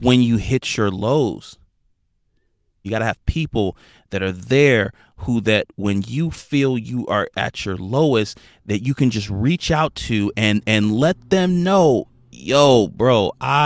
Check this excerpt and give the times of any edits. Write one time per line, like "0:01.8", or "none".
0:02.8